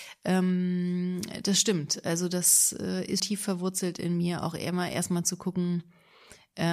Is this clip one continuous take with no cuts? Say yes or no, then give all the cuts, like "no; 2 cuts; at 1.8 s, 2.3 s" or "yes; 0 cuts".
no; 1 cut; at 3.2 s